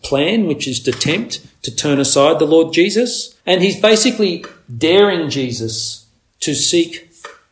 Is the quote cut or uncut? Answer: cut